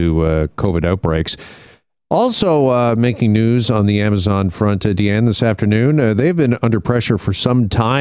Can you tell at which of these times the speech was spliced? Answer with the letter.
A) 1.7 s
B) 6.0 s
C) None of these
C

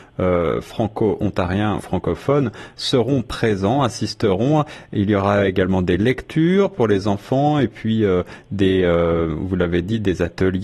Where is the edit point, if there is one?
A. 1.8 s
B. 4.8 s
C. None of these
A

